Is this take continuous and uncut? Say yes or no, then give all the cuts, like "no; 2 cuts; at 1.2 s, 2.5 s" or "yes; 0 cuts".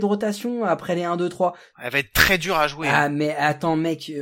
no; 1 cut; at 1.7 s